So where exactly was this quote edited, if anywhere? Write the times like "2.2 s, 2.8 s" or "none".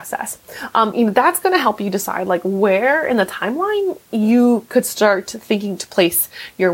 0.9 s